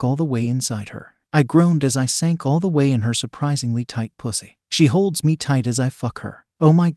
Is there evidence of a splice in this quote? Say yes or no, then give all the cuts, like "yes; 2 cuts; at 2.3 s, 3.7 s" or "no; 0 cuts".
no; 0 cuts